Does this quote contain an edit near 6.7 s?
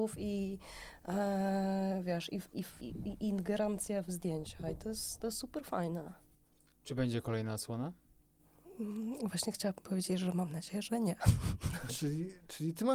no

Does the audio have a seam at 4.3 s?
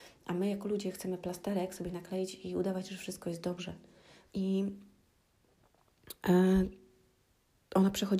yes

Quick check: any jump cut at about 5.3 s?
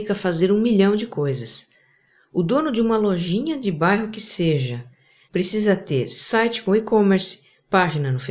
yes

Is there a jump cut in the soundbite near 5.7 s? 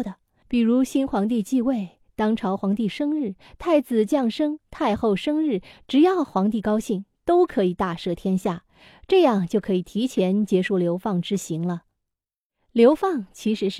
yes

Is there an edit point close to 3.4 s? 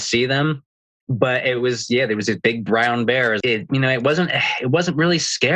yes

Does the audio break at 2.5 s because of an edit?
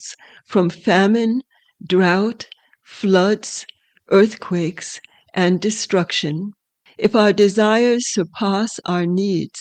no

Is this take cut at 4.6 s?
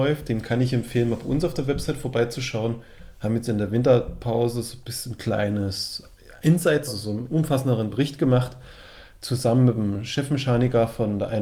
no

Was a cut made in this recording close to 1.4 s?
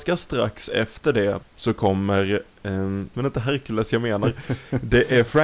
yes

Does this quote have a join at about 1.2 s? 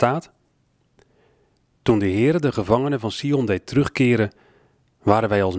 no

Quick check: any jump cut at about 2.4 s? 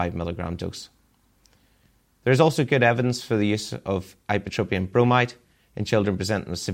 no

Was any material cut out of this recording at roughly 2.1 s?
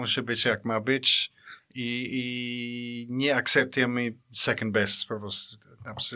no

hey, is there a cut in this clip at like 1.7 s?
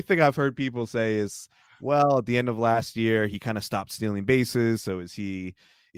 no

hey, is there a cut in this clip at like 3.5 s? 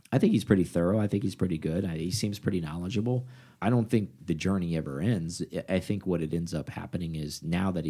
yes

